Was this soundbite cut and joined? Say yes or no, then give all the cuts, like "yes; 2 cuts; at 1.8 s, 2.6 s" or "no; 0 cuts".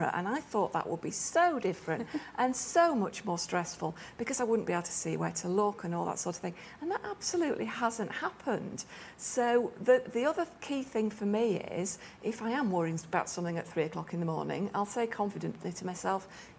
no; 0 cuts